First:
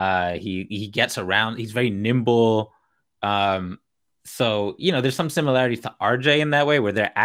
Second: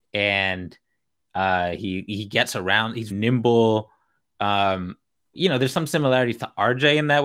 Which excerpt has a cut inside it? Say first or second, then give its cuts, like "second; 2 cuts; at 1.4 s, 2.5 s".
second; 2 cuts; at 3.1 s, 5.3 s